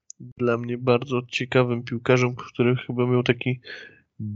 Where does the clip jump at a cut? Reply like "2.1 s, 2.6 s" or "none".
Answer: none